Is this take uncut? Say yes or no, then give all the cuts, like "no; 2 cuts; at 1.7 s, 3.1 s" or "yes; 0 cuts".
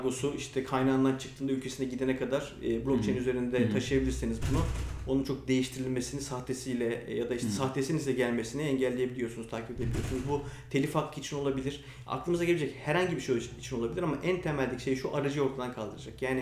yes; 0 cuts